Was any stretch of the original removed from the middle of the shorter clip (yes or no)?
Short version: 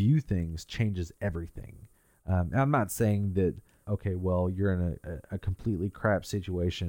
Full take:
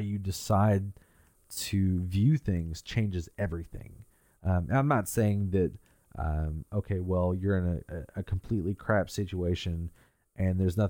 yes